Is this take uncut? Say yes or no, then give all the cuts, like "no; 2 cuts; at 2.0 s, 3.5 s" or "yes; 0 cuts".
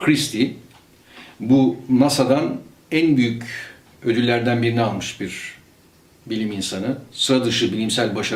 yes; 0 cuts